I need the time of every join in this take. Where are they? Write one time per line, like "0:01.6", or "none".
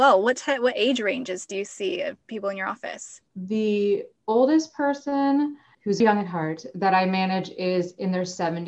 0:03.3
0:06.0